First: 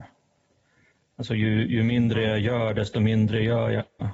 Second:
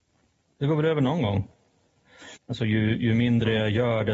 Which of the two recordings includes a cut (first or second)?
second